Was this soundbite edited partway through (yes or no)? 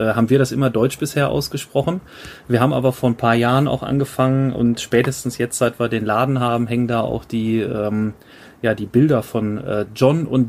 no